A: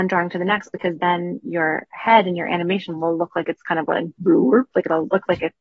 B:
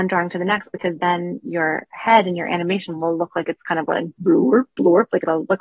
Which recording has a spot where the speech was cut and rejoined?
A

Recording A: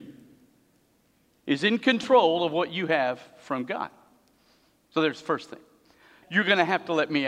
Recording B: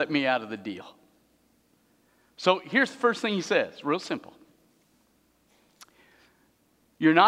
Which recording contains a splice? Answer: A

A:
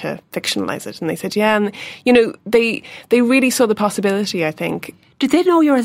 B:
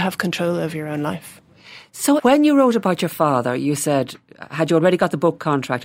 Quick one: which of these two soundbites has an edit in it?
B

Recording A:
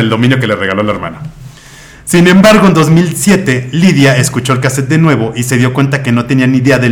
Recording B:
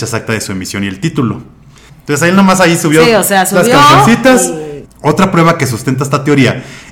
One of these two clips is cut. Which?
B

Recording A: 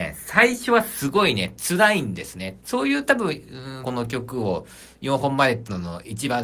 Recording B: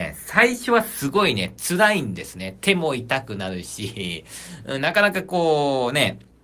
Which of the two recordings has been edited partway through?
A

